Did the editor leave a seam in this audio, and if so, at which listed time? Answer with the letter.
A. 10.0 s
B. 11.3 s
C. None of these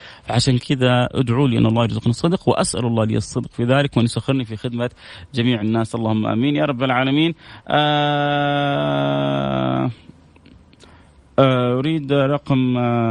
C